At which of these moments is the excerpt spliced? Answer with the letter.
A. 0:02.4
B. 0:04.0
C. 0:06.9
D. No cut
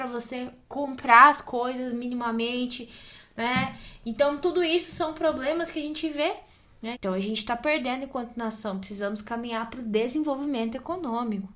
C